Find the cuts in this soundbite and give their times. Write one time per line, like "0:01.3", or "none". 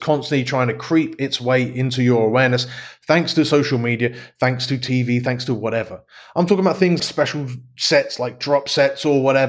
0:07.0